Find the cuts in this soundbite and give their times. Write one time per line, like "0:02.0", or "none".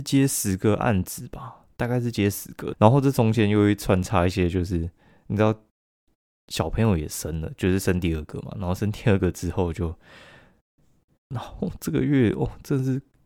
0:02.7
0:11.3